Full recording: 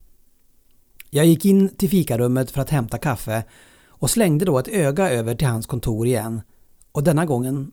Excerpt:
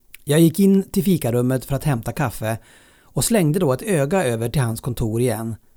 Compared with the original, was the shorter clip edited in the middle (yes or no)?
no